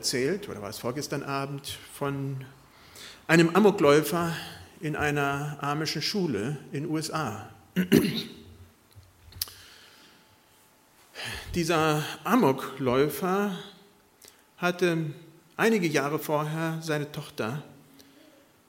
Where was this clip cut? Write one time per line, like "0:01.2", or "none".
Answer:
none